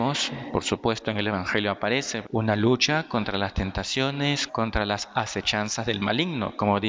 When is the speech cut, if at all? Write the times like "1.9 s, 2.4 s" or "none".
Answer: 2.2 s, 4.5 s